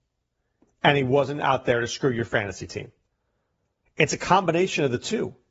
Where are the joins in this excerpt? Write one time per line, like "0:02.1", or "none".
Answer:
0:03.9